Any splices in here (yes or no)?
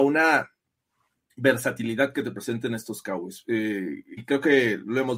yes